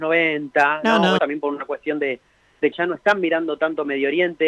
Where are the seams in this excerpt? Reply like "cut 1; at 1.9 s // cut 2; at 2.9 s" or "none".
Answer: cut 1; at 1.2 s // cut 2; at 2.7 s